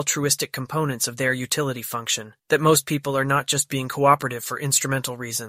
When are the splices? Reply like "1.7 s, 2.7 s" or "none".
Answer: 2.4 s